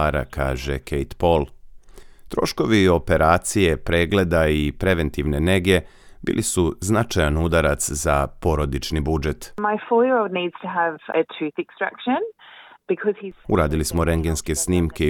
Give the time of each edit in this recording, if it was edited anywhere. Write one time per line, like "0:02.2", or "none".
0:11.1
0:13.4